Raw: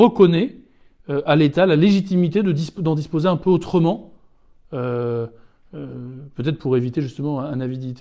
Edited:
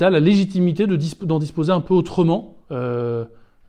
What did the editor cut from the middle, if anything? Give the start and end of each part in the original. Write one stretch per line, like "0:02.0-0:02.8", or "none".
0:04.2-0:04.7